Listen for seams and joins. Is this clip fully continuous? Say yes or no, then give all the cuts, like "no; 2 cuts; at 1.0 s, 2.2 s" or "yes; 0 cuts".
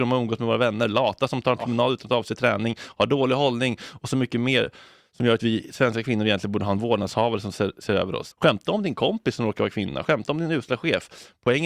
no; 3 cuts; at 5.4 s, 8.3 s, 10.0 s